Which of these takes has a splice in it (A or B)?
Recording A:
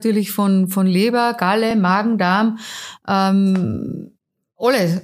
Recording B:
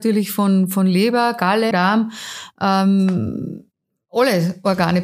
B